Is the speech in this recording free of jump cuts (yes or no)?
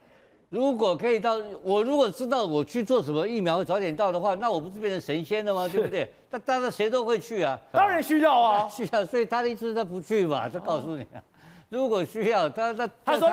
no